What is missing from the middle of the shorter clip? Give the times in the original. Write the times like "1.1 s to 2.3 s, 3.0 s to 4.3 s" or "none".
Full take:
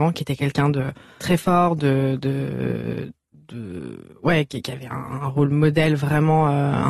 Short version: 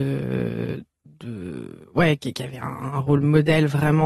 none